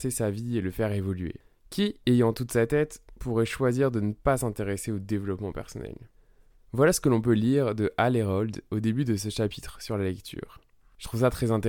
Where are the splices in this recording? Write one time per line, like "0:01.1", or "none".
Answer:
none